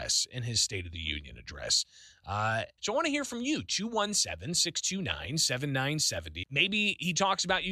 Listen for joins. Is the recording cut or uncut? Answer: cut